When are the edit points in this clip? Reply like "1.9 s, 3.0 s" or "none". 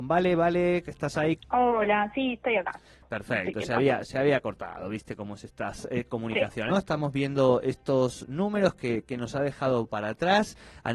1.4 s, 6.7 s